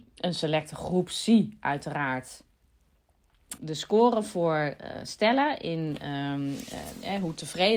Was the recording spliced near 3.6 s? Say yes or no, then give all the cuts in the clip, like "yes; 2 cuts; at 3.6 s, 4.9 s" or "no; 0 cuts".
yes; 1 cut; at 3.6 s